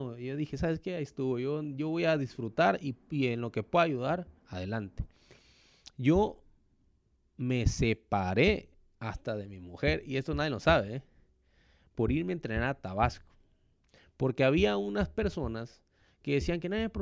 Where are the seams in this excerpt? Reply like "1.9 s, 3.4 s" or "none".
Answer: 4.4 s